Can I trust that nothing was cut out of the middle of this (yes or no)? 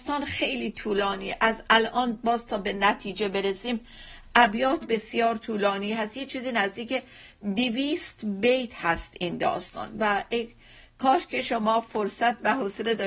no